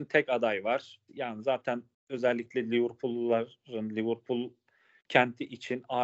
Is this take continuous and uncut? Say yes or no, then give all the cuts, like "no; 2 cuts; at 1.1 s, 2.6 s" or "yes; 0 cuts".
no; 1 cut; at 1.1 s